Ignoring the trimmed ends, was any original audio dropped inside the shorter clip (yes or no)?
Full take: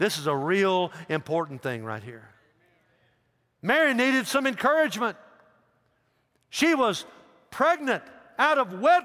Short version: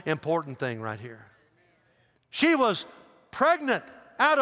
yes